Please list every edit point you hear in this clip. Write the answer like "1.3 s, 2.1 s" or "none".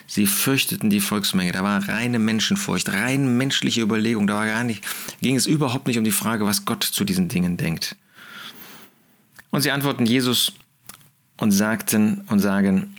none

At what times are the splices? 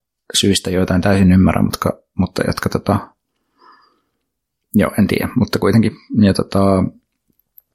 none

